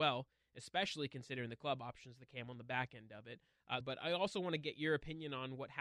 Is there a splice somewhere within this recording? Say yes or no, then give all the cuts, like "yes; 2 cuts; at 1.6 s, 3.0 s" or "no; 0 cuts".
yes; 1 cut; at 3.8 s